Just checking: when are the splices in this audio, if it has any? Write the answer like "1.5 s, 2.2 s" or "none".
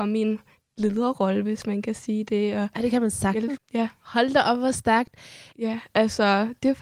3.6 s, 5.5 s